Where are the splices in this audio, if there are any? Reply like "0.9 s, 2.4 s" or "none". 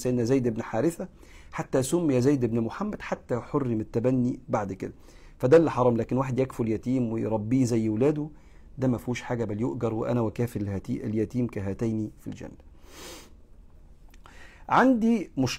none